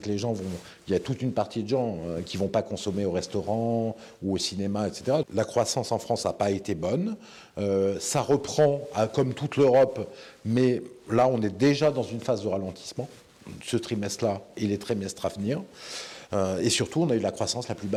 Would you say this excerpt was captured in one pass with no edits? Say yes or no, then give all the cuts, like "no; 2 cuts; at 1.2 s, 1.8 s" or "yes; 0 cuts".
no; 1 cut; at 5.2 s